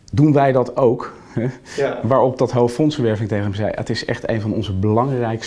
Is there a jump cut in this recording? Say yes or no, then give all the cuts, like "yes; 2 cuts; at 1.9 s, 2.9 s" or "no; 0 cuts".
no; 0 cuts